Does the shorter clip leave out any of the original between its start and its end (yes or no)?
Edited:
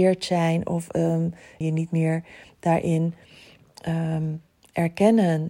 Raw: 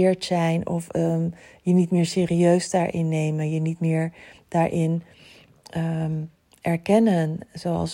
yes